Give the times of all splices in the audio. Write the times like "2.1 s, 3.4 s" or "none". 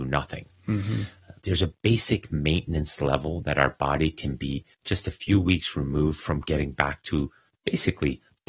1.4 s, 4.7 s

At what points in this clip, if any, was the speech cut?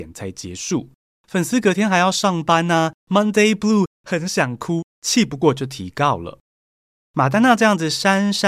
none

